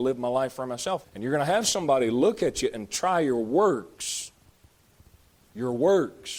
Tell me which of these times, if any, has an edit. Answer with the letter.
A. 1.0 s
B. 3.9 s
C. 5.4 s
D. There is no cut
A